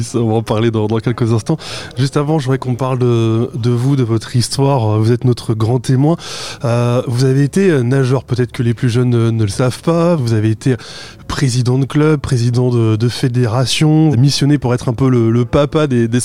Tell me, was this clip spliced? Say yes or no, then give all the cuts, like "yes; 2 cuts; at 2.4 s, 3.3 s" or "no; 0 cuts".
yes; 2 cuts; at 10.2 s, 14.1 s